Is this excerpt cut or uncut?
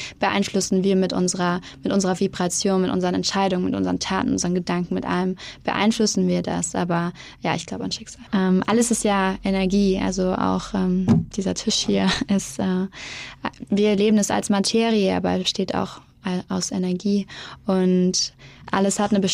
cut